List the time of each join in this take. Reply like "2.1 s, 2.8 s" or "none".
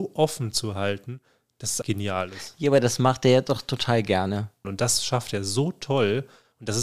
1.8 s, 4.6 s